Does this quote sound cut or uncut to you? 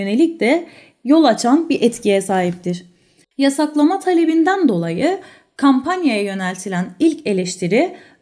cut